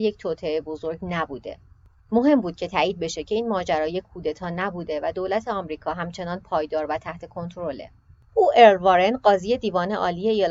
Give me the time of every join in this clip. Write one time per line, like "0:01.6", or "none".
0:08.3